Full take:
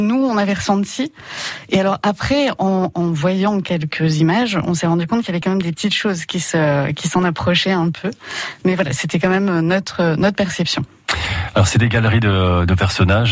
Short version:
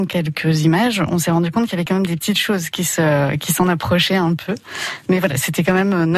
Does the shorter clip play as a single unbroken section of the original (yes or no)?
yes